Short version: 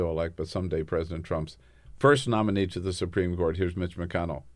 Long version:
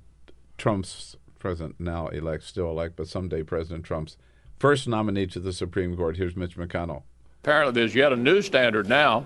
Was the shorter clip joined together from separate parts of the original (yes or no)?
no